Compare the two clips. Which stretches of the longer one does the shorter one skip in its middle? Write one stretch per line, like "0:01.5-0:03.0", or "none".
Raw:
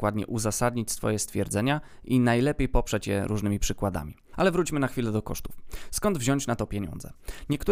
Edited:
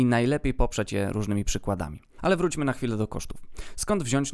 none

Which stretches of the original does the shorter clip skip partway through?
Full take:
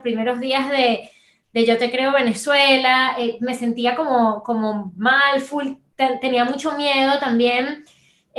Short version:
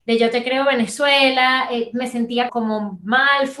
0:04.0-0:04.4

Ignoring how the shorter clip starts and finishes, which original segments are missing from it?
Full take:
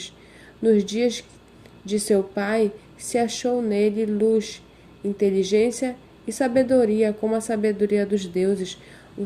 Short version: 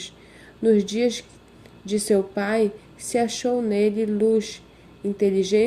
none

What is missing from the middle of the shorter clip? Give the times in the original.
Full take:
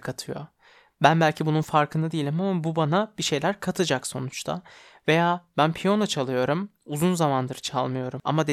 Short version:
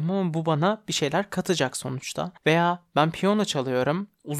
0:04.7-0:05.0

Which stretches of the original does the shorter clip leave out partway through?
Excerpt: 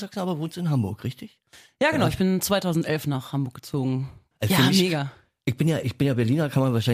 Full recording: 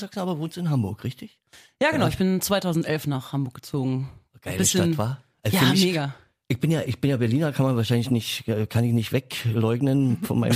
0:04.3-0:05.3

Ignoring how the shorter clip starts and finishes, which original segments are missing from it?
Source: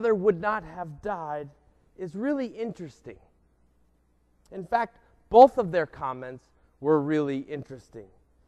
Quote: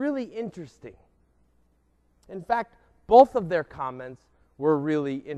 none

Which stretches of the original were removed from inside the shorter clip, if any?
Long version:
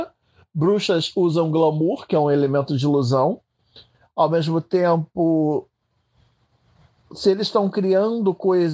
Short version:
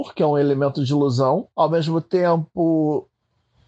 0:03.4-0:04.1

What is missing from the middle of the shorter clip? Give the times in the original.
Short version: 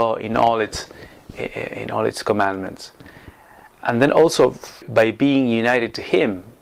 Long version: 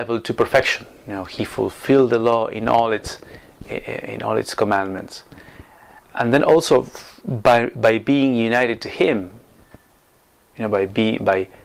0:07.1-0:07.7

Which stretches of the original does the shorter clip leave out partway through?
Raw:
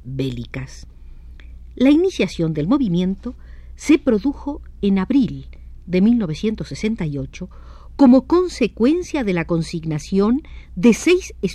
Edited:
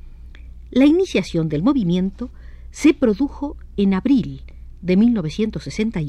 none

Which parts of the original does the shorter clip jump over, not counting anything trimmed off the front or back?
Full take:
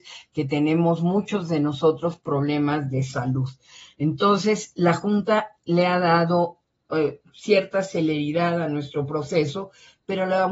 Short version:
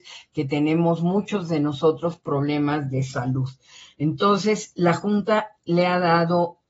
none

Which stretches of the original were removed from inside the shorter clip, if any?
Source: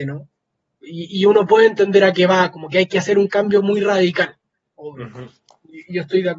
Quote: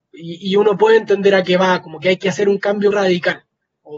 0:03.6-0:03.8

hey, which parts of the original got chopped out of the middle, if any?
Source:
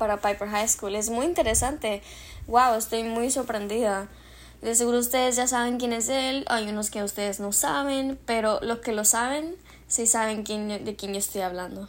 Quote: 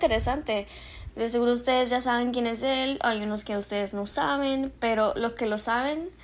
0:02.5-0:04.6

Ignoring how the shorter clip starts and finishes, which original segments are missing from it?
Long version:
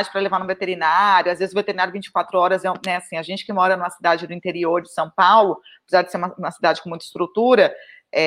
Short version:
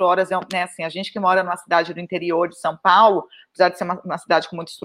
none

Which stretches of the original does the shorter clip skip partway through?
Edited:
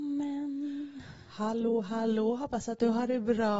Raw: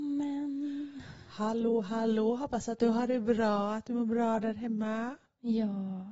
none

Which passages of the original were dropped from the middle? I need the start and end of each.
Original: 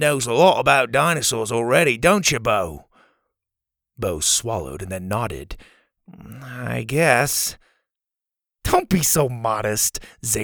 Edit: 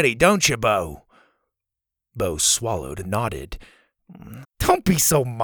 0:04.9-0:05.0
0:06.4-0:08.5

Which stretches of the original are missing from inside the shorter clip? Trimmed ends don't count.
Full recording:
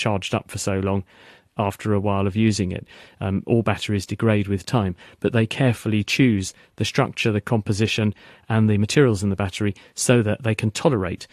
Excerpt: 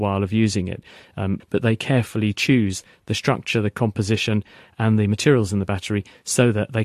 0:03.4-0:05.1

